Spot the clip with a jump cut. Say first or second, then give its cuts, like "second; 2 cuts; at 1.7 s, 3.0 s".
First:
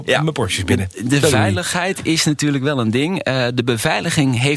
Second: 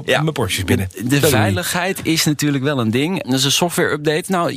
second; 1 cut; at 3.2 s